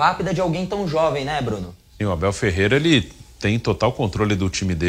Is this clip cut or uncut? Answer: uncut